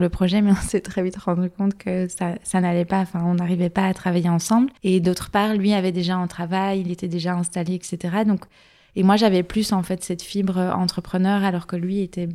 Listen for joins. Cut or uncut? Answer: cut